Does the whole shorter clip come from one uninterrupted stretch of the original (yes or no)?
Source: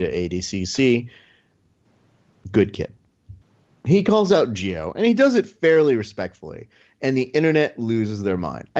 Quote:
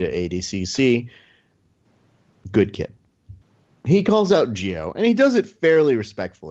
yes